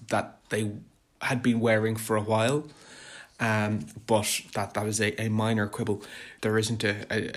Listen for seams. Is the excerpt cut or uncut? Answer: cut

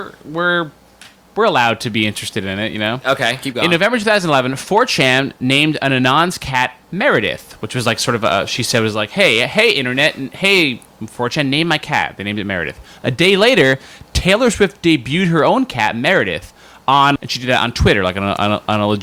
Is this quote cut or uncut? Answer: cut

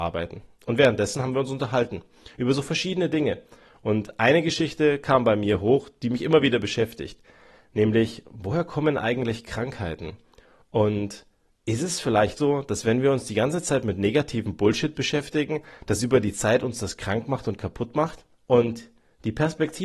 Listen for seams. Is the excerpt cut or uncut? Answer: cut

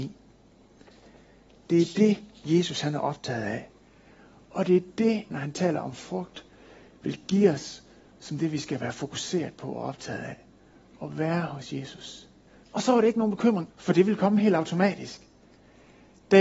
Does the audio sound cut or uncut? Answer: cut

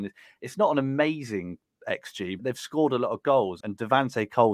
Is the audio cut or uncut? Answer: cut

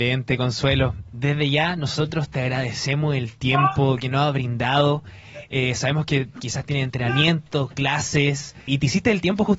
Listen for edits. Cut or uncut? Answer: cut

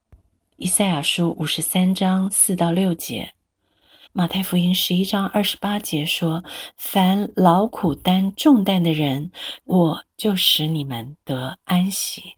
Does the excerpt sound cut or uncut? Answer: cut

